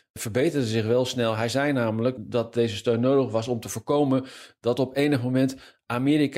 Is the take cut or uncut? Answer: uncut